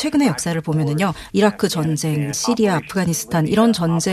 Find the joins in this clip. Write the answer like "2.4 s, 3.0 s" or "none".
1.3 s, 2.3 s